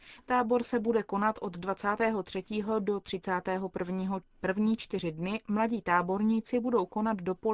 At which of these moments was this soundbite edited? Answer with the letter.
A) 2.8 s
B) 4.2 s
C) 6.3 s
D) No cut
B